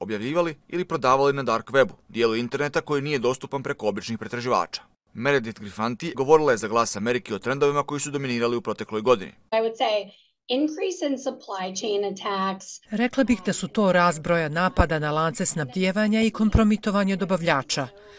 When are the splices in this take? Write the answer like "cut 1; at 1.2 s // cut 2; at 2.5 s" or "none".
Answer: cut 1; at 6.1 s